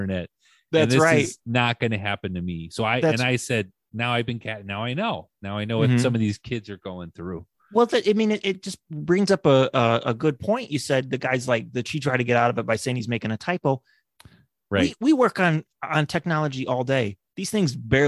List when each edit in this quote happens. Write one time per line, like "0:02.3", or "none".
none